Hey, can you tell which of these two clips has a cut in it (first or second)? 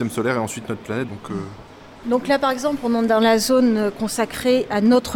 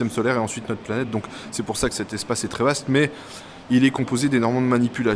first